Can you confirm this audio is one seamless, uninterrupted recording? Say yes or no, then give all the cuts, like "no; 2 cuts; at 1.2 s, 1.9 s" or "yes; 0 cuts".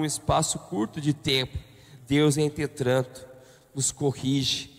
no; 1 cut; at 2.0 s